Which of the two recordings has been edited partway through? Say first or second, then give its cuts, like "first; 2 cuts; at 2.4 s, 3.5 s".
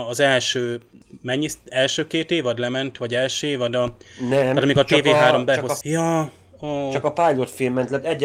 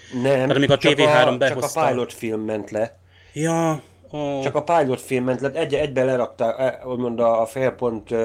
first; 1 cut; at 5.8 s